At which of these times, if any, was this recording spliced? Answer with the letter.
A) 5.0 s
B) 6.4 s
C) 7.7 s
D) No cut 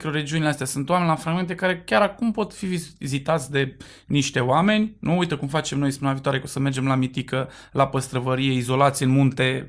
D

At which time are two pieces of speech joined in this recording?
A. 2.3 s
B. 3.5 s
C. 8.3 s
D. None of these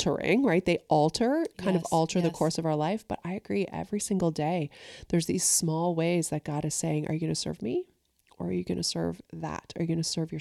D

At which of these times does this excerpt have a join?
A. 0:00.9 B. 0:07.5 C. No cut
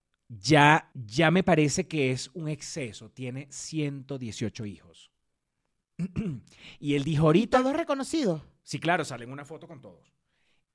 A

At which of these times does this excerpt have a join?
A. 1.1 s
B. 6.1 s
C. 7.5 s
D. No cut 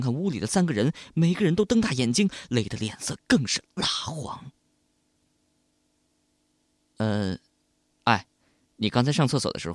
D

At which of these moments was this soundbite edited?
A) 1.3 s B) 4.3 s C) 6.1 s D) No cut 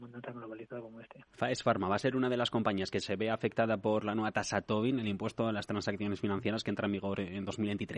A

